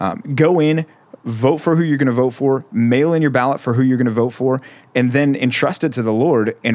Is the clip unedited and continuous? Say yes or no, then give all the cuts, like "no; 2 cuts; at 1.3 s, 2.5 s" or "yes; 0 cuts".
yes; 0 cuts